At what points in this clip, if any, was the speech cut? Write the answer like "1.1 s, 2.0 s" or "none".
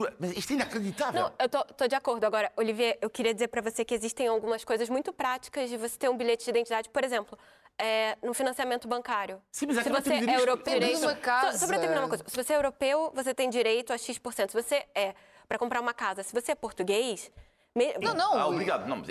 10.7 s, 18.0 s